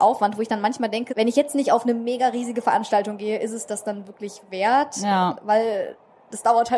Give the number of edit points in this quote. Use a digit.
1